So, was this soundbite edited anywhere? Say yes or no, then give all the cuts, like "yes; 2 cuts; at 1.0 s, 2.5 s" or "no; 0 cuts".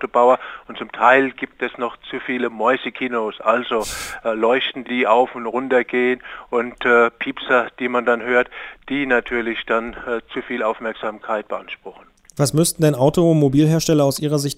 no; 0 cuts